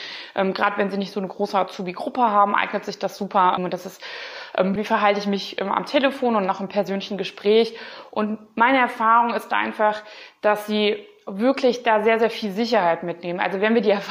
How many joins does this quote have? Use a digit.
2